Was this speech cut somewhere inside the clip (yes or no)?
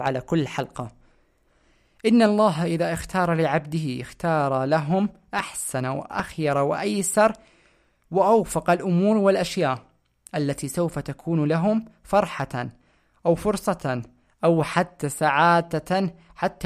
no